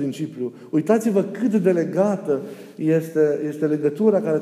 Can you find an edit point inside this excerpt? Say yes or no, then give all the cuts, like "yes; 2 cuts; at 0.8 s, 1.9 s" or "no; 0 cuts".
no; 0 cuts